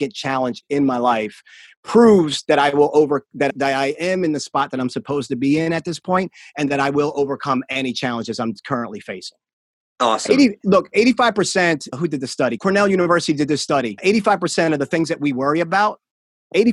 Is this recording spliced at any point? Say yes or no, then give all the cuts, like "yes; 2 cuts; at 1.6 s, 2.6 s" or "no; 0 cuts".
no; 0 cuts